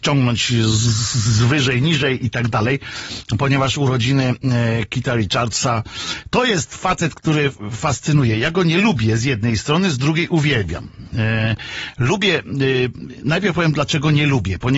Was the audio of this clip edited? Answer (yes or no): no